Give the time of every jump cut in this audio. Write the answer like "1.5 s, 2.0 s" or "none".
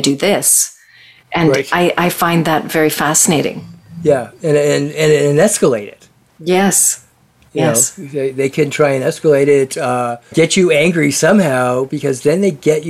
10.3 s